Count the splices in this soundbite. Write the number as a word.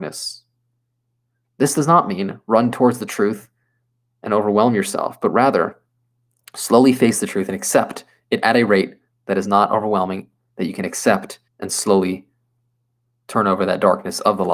one